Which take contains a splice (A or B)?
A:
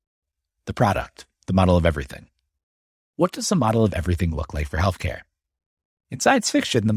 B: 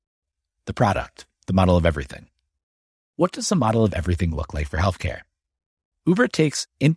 B